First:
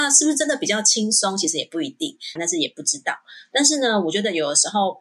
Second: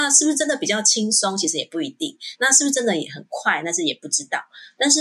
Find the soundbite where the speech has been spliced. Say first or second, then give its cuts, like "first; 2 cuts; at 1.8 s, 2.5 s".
first; 1 cut; at 2.4 s